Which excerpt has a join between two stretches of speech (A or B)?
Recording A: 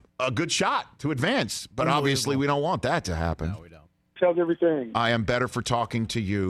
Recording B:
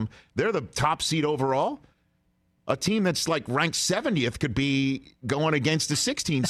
A